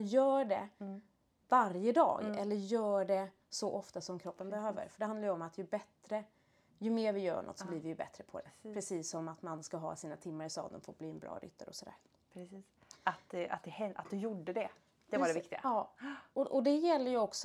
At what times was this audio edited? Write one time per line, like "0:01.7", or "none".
none